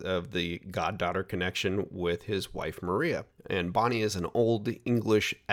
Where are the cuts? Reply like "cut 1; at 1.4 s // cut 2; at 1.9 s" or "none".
cut 1; at 3.4 s